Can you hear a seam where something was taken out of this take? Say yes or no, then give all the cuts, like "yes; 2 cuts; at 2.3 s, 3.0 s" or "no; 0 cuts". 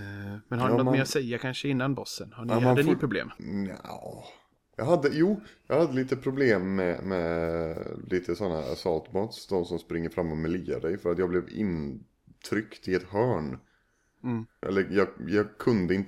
yes; 2 cuts; at 3.4 s, 14.6 s